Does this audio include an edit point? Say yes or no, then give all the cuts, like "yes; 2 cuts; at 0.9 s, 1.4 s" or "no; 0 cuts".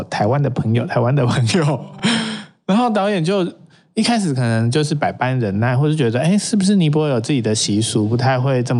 no; 0 cuts